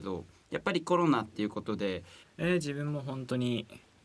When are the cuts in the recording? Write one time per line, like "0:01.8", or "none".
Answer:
0:02.2